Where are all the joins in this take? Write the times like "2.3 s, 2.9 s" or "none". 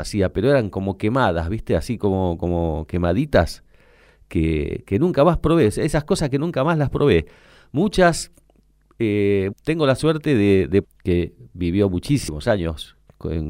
9.5 s, 10.8 s

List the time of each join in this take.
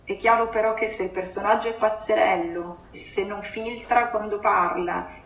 2.9 s

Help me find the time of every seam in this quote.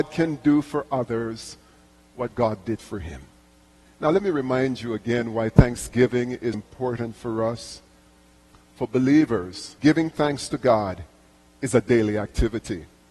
6.5 s, 8.5 s, 9.8 s

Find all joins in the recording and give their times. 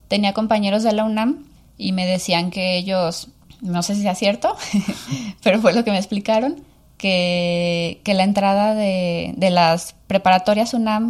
none

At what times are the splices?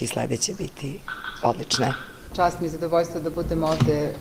2.3 s

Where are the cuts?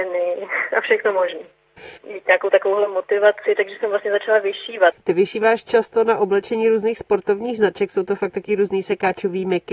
2.0 s, 4.9 s

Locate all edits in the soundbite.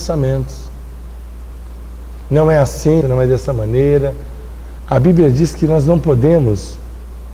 3.0 s, 4.8 s

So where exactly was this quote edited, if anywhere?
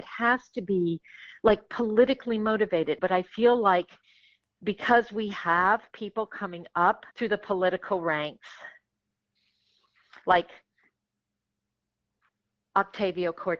3.0 s, 7.1 s

